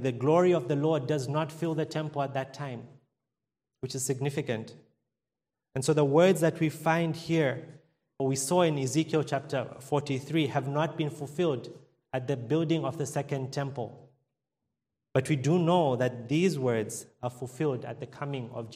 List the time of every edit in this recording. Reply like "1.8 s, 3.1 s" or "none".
8.2 s